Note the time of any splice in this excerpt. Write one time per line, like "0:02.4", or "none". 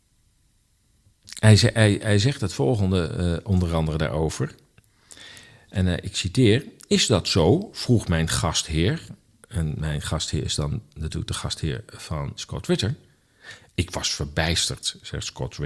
0:13.7